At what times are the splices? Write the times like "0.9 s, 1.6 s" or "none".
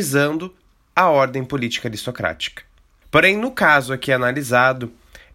3.0 s